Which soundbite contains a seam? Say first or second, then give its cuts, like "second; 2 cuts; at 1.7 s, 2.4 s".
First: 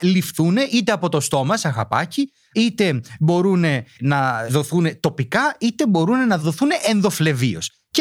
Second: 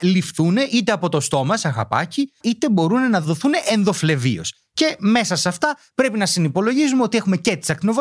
second; 1 cut; at 2.4 s